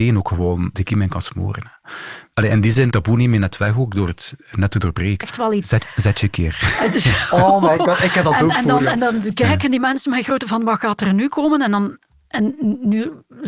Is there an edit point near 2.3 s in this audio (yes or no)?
no